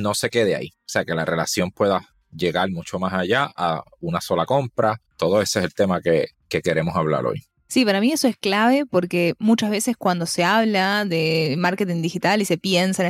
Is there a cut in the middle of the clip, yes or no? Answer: no